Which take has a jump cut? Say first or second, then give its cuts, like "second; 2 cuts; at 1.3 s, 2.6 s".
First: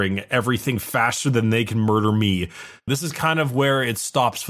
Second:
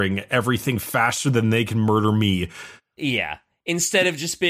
first; 1 cut; at 2.9 s